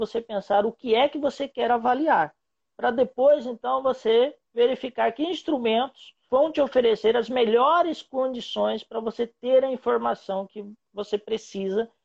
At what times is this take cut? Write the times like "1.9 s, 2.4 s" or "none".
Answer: 6.3 s